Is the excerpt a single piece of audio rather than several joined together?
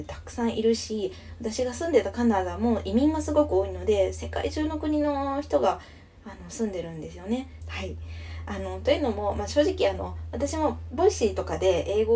no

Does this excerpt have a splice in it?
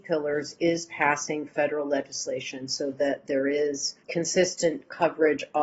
yes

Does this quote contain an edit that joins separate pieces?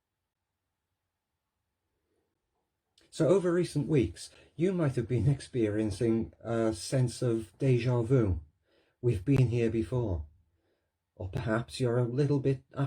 no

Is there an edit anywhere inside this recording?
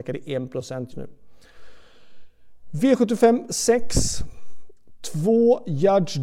yes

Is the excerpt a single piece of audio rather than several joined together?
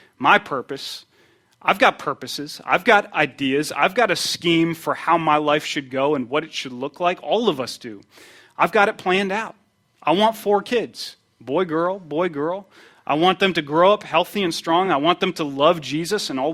yes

